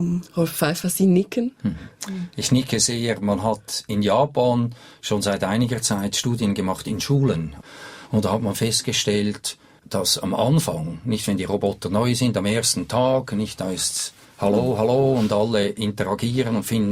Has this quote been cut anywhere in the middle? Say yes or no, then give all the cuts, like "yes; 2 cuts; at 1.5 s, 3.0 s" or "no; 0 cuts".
no; 0 cuts